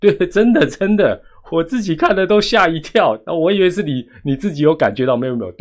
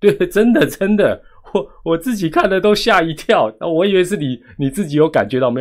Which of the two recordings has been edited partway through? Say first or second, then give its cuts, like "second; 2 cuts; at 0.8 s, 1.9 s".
first; 1 cut; at 1.5 s